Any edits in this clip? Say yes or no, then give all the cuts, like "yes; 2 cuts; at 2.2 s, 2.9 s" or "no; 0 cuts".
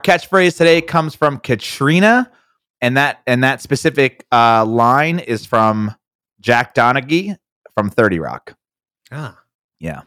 no; 0 cuts